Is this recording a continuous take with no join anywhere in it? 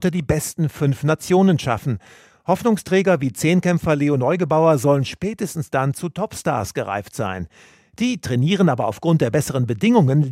yes; 0 cuts

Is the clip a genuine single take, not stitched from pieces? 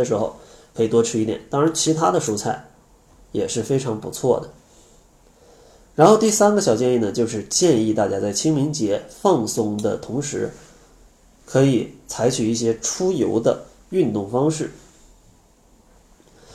yes; 0 cuts

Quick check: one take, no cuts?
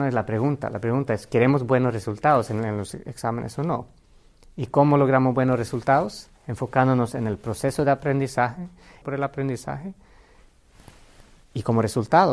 no; 2 cuts; at 6.4 s, 9.0 s

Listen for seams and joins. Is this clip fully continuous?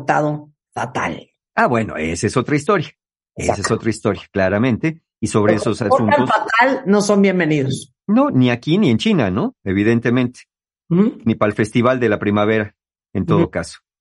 yes; 0 cuts

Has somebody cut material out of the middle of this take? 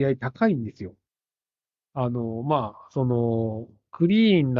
no; 0 cuts

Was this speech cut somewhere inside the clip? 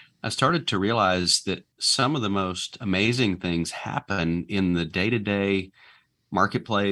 yes; 1 cut; at 1.7 s

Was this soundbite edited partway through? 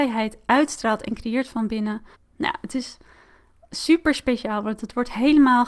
yes; 1 cut; at 2.1 s

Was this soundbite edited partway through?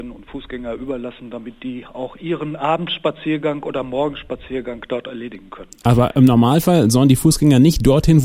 no; 0 cuts

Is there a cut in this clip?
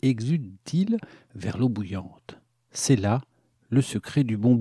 no; 0 cuts

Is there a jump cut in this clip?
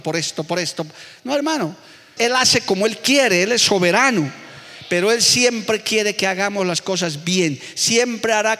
yes; 1 cut; at 2.2 s

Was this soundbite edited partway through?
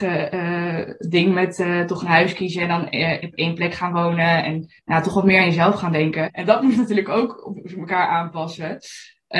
yes; 2 cuts; at 4.8 s, 6.3 s

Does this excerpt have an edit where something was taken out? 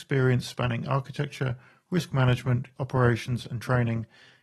yes; 1 cut; at 2.8 s

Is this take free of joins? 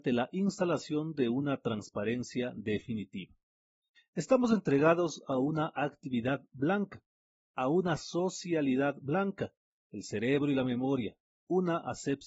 no; 1 cut; at 9.7 s

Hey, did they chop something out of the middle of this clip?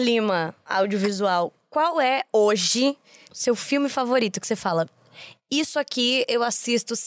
yes; 1 cut; at 3.2 s

